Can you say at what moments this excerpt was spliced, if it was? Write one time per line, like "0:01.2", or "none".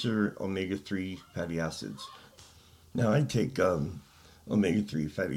none